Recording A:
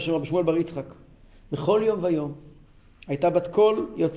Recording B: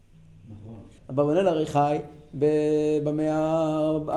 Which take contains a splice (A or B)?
B